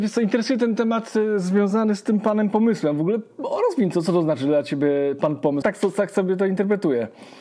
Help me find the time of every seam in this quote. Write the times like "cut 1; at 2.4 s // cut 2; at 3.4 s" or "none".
cut 1; at 5.6 s